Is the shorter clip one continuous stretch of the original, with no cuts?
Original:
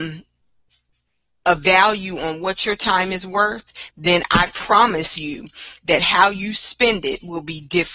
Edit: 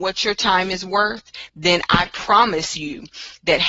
yes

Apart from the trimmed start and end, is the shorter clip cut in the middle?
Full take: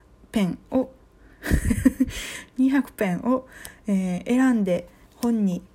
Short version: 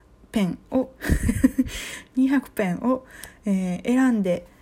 yes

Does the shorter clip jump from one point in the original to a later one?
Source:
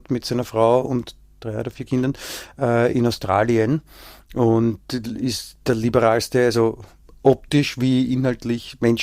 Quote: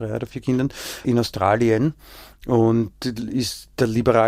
yes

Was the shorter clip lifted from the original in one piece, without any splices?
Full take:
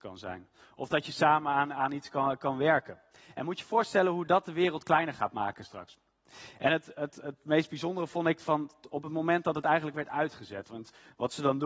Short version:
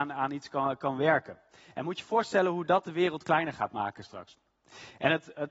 yes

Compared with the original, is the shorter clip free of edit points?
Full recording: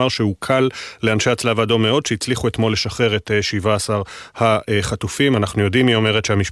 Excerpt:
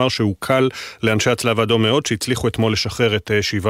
yes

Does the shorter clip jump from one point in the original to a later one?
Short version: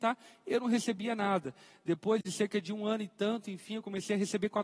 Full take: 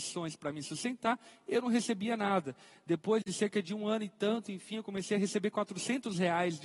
no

